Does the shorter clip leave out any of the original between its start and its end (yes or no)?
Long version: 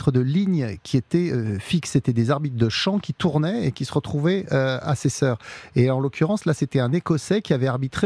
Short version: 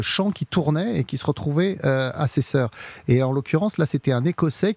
no